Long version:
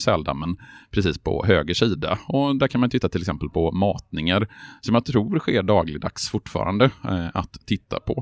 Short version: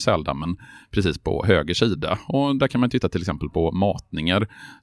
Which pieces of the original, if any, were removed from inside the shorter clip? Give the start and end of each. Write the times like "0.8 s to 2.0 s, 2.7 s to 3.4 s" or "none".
none